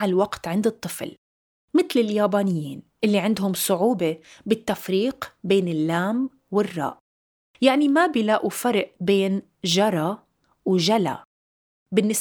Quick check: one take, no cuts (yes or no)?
yes